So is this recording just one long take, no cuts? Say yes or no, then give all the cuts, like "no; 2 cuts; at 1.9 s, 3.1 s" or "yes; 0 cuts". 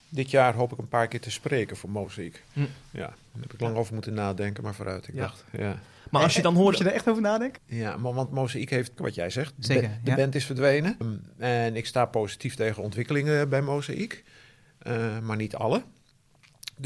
no; 3 cuts; at 7.6 s, 9.0 s, 11.0 s